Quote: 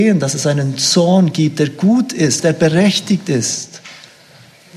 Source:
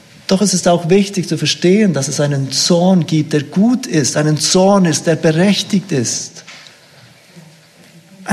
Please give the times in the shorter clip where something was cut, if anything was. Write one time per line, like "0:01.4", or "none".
0:02.4

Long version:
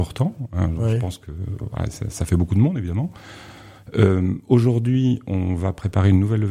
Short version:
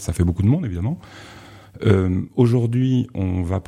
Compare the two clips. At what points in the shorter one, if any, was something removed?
none

